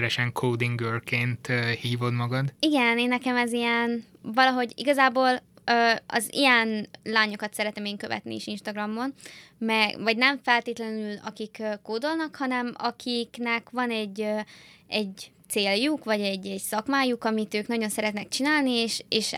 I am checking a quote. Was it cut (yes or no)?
no